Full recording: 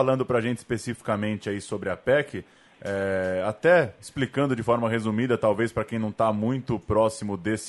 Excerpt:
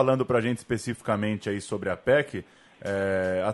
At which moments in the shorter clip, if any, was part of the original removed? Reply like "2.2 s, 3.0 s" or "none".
none